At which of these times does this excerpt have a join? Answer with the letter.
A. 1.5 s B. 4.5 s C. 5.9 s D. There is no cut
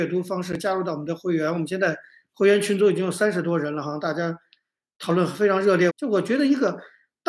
C